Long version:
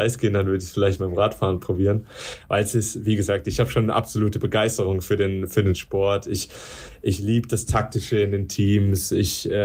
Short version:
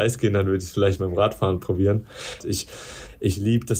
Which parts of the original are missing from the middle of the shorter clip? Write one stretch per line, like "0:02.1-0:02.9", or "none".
0:02.4-0:06.2